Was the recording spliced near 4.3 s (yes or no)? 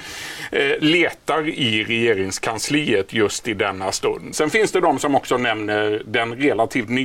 yes